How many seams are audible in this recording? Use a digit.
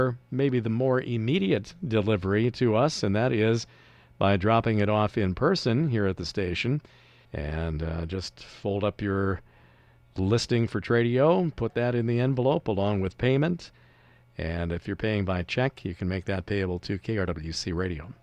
1